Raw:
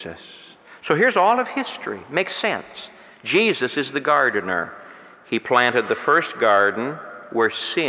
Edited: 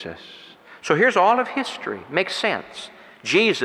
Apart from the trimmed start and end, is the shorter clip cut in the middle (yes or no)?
no